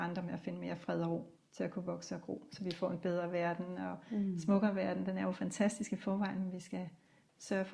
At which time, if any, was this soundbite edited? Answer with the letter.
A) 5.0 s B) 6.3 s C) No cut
C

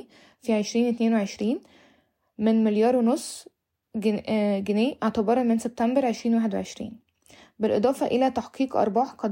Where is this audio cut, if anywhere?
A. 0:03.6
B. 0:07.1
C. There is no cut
C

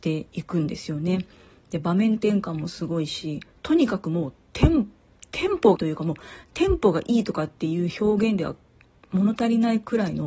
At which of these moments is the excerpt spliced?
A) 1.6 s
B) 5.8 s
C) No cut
B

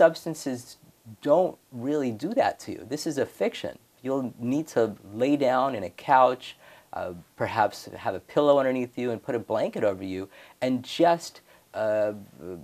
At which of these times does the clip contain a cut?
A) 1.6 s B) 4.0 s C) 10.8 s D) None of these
B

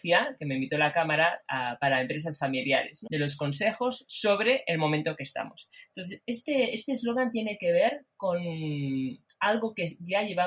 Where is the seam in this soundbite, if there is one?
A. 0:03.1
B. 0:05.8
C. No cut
A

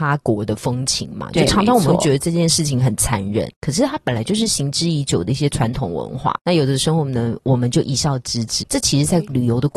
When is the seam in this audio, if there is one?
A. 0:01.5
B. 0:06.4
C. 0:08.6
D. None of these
C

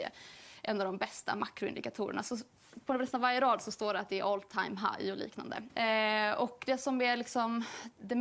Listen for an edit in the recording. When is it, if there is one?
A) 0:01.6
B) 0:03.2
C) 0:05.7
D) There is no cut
C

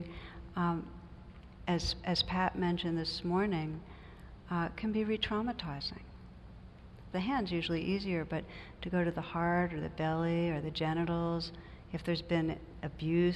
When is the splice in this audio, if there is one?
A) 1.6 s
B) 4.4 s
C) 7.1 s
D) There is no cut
C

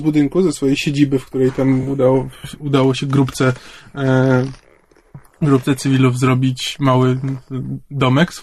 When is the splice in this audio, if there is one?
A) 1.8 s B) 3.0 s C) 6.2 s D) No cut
D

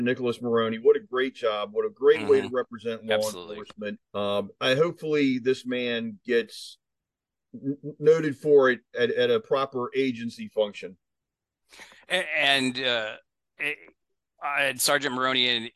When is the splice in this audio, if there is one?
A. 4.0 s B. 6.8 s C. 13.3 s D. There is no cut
A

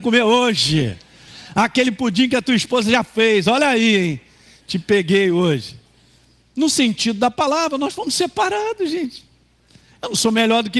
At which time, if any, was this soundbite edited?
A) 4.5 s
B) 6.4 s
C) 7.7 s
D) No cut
B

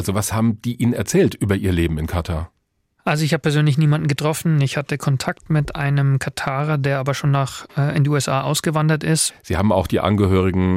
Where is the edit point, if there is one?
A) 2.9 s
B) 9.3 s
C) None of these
B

